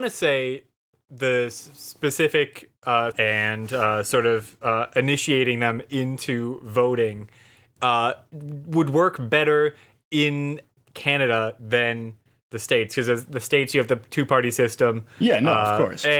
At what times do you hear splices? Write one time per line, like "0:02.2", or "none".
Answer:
0:03.1